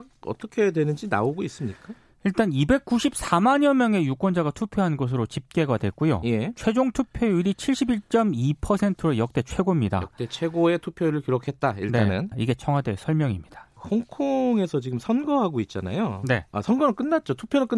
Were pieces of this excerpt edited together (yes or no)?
yes